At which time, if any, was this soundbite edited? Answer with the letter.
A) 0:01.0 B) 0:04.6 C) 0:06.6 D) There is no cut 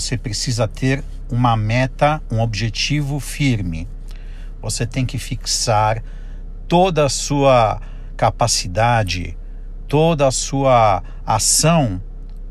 D